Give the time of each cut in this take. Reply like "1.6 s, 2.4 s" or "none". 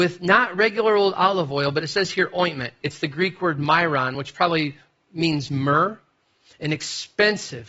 none